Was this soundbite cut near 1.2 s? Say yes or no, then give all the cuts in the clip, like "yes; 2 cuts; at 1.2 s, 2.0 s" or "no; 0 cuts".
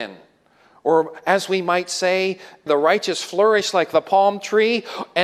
no; 1 cut; at 2.7 s